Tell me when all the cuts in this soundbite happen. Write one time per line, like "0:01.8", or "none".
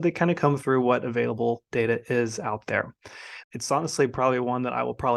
0:03.4